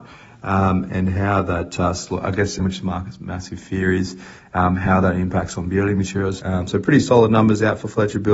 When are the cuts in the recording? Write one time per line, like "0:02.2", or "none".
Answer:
0:02.6
0:06.4